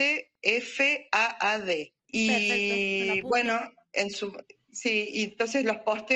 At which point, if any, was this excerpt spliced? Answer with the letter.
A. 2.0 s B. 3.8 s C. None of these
A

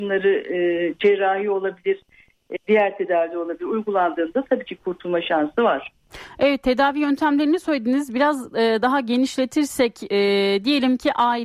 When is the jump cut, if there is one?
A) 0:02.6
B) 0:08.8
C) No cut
A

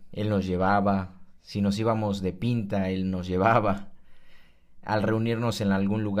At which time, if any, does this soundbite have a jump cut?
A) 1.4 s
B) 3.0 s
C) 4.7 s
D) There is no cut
D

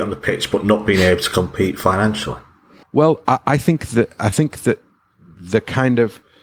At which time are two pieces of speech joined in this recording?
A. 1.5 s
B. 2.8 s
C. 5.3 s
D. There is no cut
B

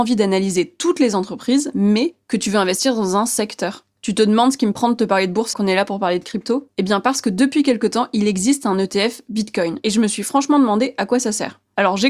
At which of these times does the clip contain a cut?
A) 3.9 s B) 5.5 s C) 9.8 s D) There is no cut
B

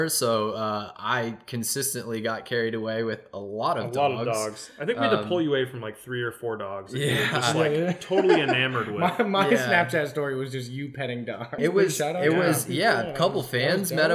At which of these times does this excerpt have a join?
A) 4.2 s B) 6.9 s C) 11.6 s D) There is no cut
C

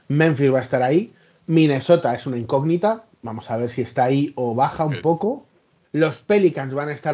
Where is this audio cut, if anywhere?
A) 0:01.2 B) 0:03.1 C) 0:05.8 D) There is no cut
C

